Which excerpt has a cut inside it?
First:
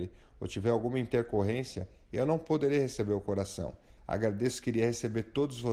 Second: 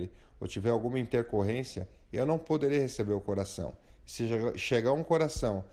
first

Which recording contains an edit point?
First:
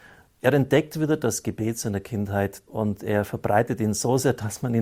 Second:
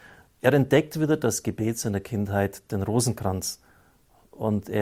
first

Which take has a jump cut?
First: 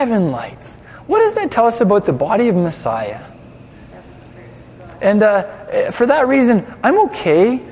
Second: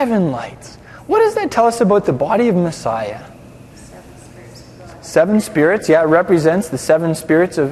first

